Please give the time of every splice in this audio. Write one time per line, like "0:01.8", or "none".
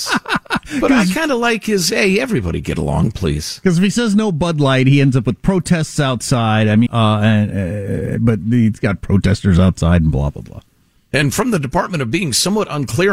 0:06.9